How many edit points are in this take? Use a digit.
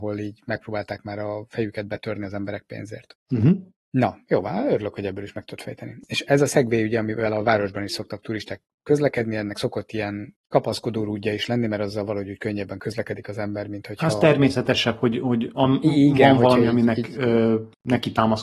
0